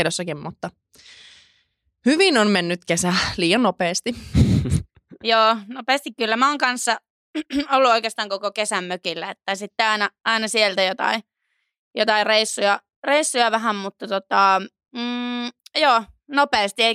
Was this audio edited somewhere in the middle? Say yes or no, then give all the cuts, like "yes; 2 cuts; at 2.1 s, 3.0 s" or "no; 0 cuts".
no; 0 cuts